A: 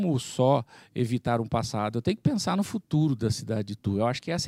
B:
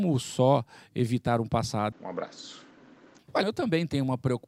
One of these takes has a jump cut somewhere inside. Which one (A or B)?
B